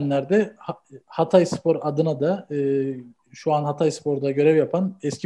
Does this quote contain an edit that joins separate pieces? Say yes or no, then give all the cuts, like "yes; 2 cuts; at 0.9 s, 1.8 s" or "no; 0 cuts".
no; 0 cuts